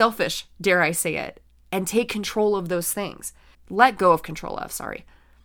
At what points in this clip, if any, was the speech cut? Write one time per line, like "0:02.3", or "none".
0:03.5

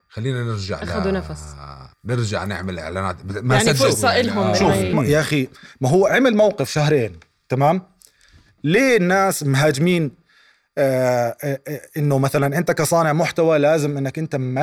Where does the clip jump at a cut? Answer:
0:01.9
0:04.9

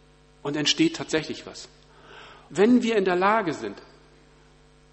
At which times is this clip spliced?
0:02.5

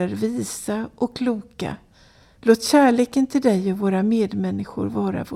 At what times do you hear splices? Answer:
0:02.4

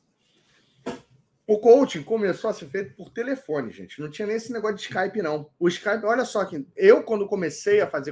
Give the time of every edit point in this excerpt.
none

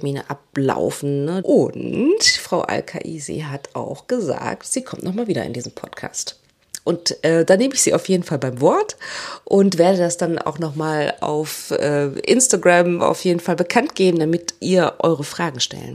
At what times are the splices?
0:01.4

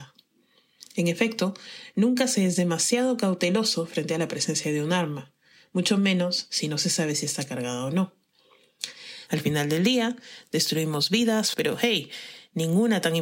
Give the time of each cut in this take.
0:09.3
0:11.5

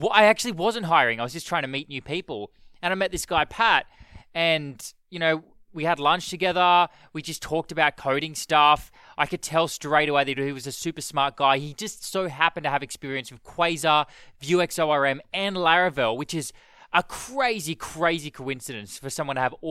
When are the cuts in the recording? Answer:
none

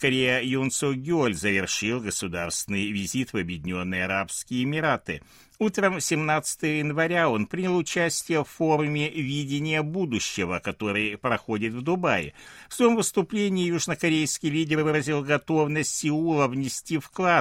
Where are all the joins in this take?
none

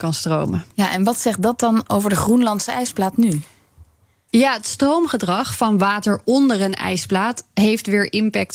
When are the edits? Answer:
none

